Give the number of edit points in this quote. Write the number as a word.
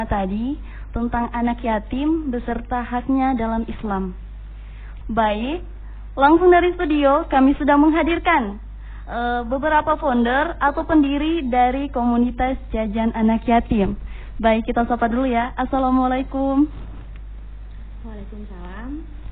one